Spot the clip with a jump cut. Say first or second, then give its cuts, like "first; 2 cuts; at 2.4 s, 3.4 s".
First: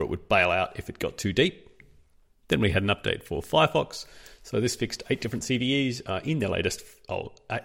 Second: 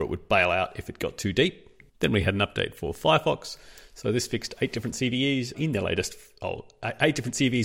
second; 2 cuts; at 1.9 s, 5.5 s